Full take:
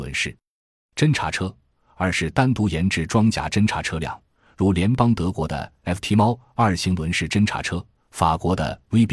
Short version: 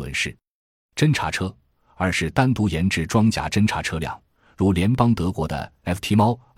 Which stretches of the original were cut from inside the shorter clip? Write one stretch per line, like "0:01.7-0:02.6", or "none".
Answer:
none